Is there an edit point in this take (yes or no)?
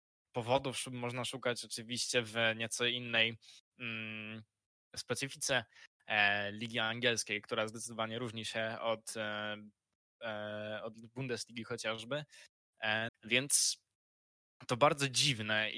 yes